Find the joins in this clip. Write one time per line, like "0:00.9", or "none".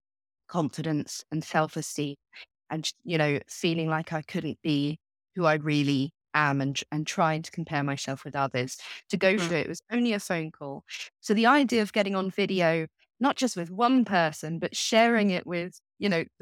0:09.5